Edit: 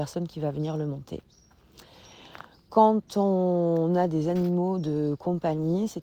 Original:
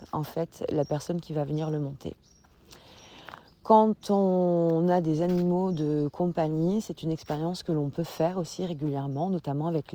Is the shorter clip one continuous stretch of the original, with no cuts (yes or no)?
yes